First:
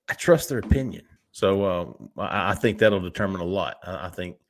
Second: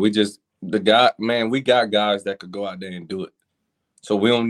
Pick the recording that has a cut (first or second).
first